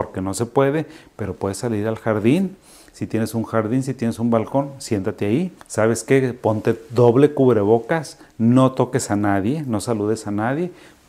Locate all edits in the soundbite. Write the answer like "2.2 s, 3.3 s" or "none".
5.6 s